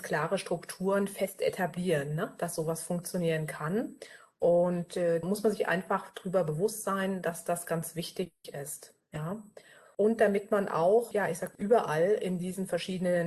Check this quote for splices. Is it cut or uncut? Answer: cut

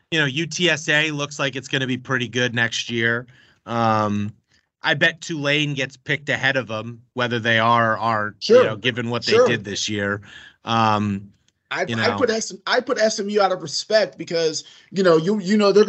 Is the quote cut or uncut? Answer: uncut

